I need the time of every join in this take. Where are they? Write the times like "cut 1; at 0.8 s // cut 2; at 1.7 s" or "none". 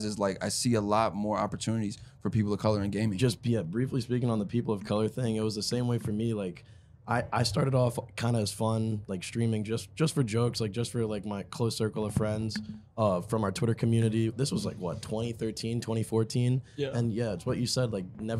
none